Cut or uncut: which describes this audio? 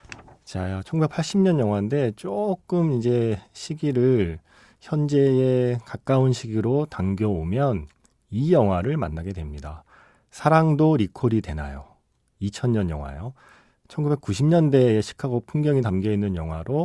uncut